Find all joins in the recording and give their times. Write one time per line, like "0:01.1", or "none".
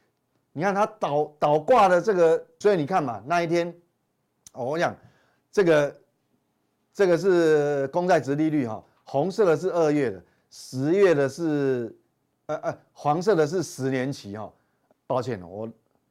0:02.6
0:14.9